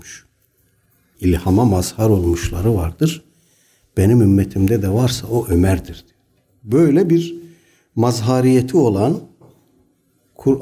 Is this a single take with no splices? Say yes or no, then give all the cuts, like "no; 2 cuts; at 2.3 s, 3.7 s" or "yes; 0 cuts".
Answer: no; 1 cut; at 1.1 s